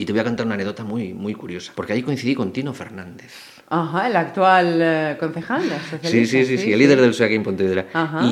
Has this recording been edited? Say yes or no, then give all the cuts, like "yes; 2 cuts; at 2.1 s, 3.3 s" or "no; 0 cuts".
yes; 1 cut; at 1.7 s